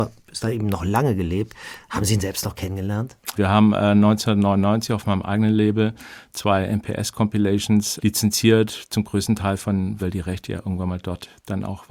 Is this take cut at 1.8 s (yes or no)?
no